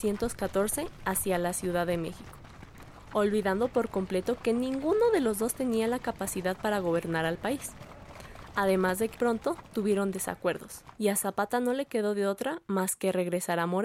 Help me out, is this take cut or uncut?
cut